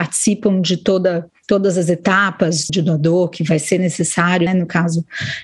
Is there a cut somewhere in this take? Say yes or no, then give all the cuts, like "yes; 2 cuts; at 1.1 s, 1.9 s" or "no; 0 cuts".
yes; 2 cuts; at 2.7 s, 4.5 s